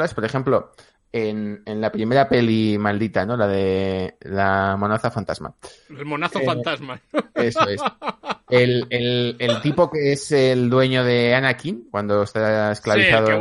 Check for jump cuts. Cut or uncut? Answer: uncut